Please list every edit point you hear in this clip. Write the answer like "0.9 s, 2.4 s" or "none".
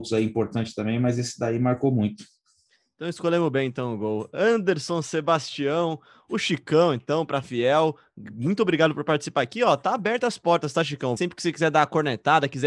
11.2 s